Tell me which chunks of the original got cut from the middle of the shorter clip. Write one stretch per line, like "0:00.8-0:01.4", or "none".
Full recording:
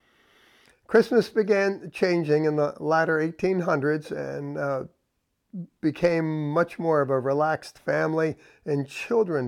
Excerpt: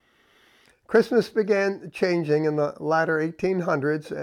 none